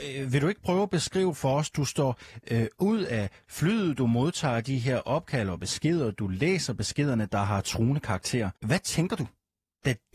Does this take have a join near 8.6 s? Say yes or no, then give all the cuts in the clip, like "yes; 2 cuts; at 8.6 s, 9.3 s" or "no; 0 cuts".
yes; 1 cut; at 8.6 s